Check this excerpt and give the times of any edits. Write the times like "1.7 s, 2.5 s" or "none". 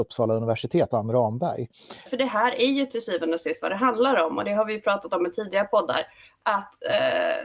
2.1 s